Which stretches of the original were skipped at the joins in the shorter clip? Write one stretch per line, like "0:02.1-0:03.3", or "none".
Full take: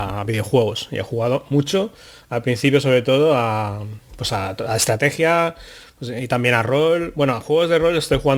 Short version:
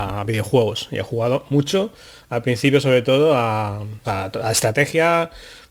0:04.0-0:04.3